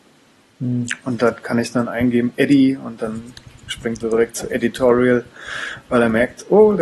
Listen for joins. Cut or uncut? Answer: uncut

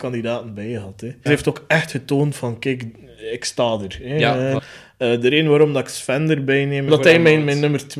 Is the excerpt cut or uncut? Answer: cut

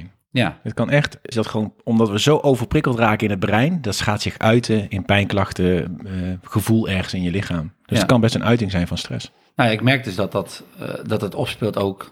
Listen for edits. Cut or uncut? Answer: cut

